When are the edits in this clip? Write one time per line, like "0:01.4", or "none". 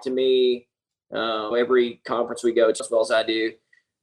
0:01.5
0:02.8